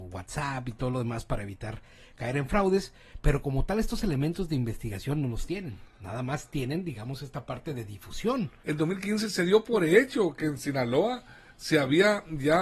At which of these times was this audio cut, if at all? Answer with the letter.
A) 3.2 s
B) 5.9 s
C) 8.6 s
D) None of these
C